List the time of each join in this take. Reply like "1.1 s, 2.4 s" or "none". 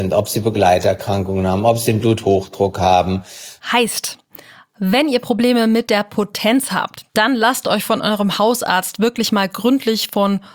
7.1 s